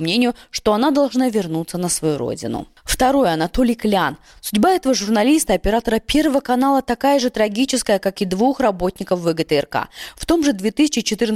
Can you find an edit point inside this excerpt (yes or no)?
no